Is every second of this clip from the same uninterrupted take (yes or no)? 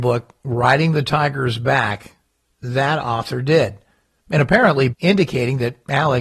no